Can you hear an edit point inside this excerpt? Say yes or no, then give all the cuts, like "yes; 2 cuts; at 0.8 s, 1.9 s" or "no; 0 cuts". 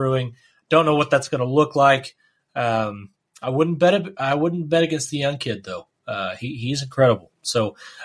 no; 0 cuts